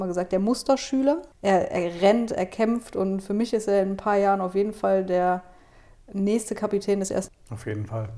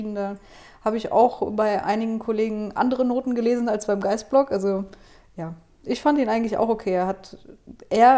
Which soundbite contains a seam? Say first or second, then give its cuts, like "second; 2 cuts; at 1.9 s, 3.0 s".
first; 2 cuts; at 1.3 s, 7.3 s